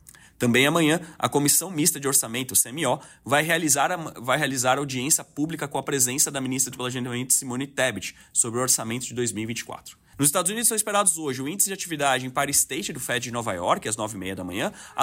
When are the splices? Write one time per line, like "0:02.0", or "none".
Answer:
0:10.1